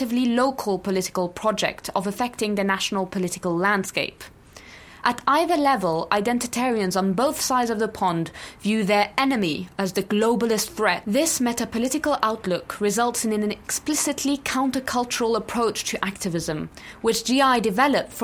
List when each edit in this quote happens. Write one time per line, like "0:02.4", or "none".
none